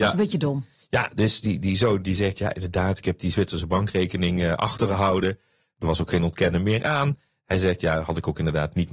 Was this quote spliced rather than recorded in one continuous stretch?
no; 0 cuts

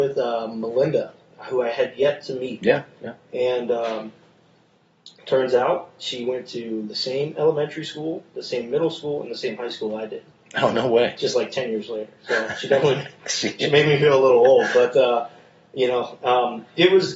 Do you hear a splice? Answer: no; 0 cuts

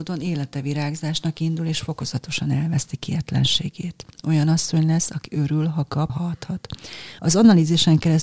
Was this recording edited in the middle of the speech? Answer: yes; 2 cuts; at 6.1 s, 7.2 s

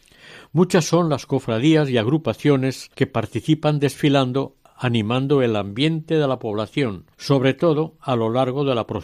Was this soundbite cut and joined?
yes; 2 cuts; at 2.9 s, 7.1 s

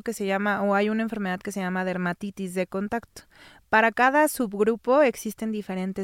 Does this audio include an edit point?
no; 0 cuts

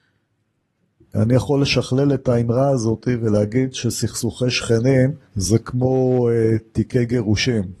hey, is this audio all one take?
no; 2 cuts; at 1.1 s, 5.2 s

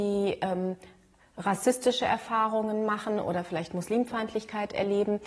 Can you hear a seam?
no; 0 cuts

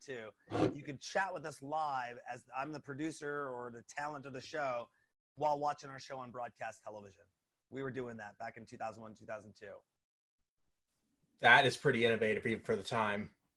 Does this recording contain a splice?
no; 0 cuts

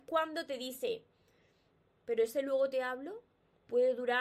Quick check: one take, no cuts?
no; 1 cut; at 1.8 s

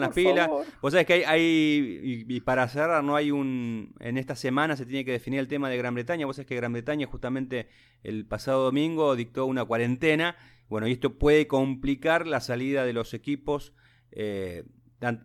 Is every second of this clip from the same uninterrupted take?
yes; 0 cuts

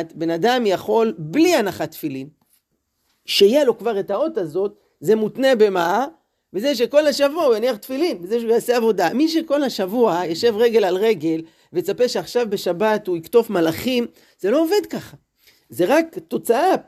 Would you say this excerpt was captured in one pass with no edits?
yes; 0 cuts

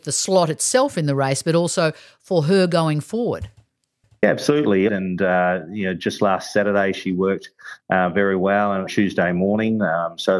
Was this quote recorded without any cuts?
no; 2 cuts; at 4.9 s, 8.9 s

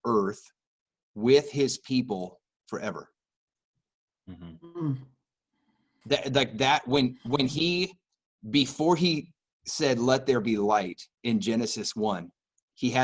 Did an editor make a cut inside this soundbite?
yes; 2 cuts; at 6.0 s, 11.1 s

